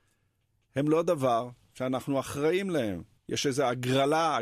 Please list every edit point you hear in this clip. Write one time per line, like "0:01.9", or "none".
0:03.2